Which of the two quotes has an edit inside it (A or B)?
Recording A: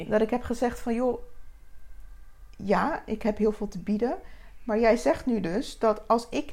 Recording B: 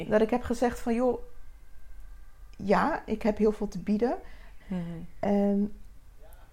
B